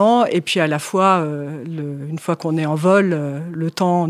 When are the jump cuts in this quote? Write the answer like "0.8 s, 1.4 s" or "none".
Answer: none

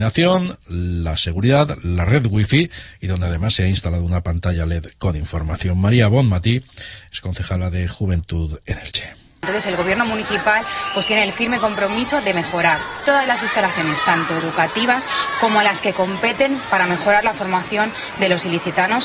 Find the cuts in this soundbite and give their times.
none

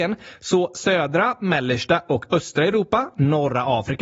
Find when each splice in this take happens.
none

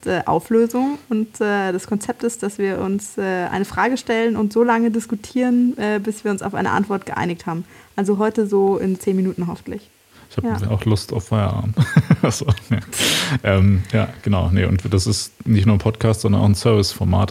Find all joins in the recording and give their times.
9.0 s

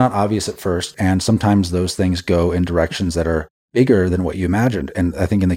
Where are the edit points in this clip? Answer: 0.9 s

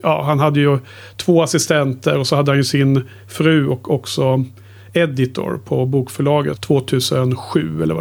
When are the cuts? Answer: 6.6 s

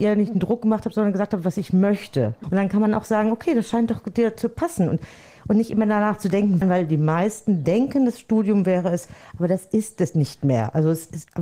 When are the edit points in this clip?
2.4 s, 6.6 s

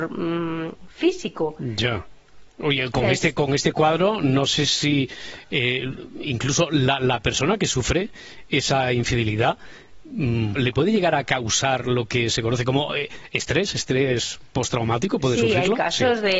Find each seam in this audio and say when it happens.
10.6 s

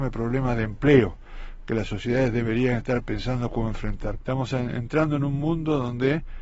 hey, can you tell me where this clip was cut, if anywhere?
4.2 s

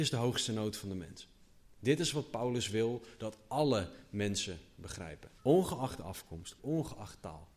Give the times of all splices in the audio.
5.4 s, 6.6 s

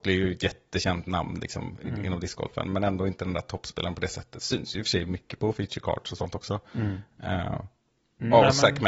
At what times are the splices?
none

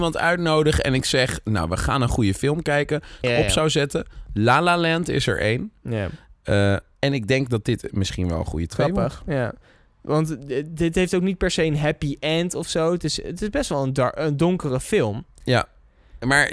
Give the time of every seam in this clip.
3.2 s

